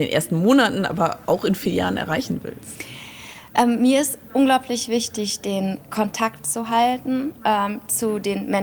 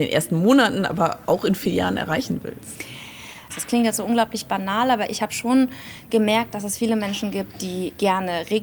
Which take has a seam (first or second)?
second